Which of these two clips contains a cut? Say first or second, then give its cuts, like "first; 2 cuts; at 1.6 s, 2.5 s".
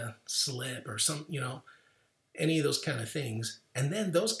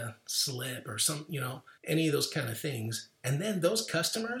second; 1 cut; at 1.8 s